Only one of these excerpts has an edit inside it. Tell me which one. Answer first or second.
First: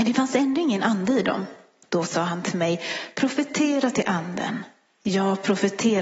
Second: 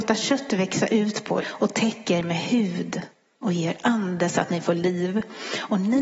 second